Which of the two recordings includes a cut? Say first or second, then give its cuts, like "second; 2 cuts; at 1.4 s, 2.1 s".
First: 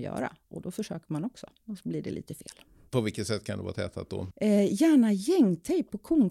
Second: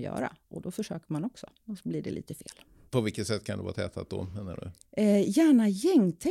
first; 1 cut; at 4.3 s